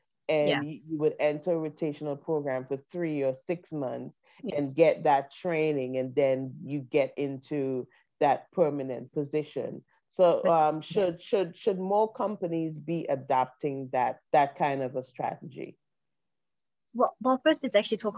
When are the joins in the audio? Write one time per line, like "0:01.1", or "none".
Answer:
0:14.3